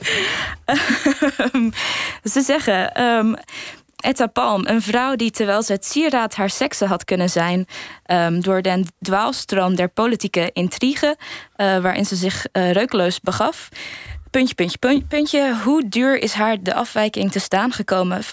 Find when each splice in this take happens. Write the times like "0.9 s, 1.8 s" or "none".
none